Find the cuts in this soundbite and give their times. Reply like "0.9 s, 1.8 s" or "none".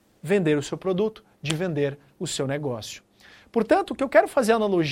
none